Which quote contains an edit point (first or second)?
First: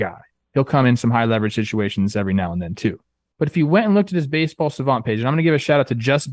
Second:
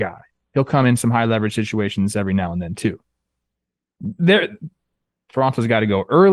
first